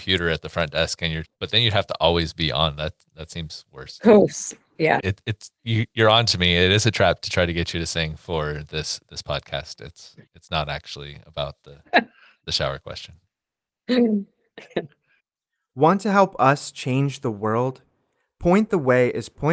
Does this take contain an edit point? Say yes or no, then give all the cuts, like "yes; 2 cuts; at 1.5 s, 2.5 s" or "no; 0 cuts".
yes; 2 cuts; at 1.2 s, 5.0 s